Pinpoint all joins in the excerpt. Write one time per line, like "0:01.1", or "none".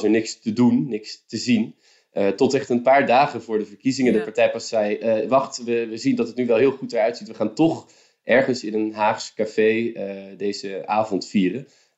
none